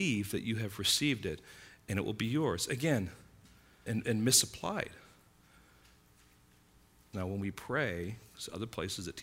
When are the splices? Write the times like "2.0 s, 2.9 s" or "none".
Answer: 3.9 s, 7.1 s